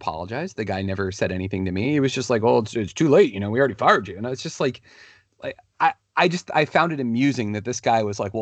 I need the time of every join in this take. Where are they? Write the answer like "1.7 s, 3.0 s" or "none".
none